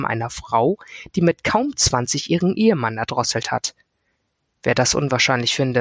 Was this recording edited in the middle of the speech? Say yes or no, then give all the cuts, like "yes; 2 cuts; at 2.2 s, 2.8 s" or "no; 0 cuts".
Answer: no; 0 cuts